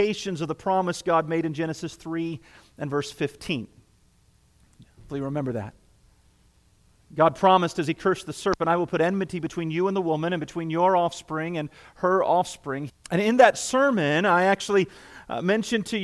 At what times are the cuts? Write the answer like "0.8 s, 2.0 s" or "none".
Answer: 12.9 s